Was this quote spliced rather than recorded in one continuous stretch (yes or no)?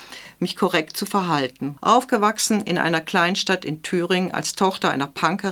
yes